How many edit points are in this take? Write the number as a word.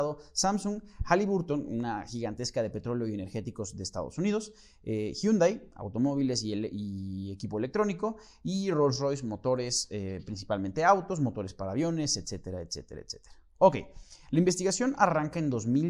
zero